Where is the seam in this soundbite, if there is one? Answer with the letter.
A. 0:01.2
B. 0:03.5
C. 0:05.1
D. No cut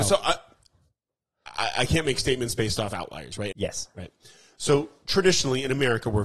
B